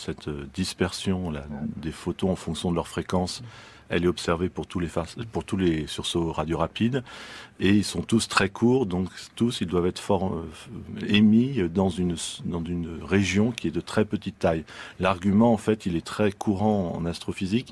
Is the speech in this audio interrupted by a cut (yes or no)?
yes